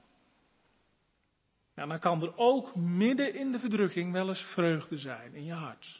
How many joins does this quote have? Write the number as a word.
zero